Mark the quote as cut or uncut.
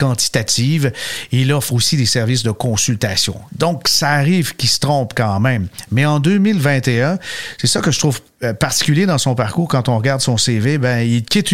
cut